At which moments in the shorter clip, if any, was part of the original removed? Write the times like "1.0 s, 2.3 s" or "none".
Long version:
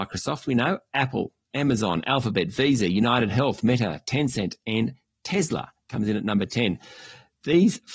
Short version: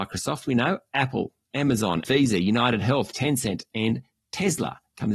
2.0 s, 3.1 s